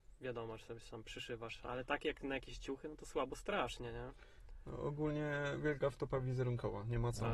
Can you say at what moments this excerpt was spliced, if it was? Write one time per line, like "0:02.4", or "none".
none